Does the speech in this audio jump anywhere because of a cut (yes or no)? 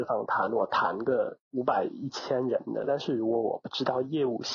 yes